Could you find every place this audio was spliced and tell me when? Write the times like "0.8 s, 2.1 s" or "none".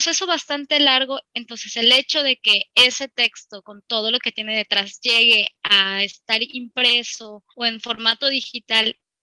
7.5 s